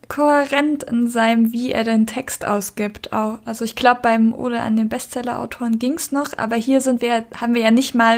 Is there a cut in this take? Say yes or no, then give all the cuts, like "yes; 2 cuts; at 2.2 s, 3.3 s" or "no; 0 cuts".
no; 0 cuts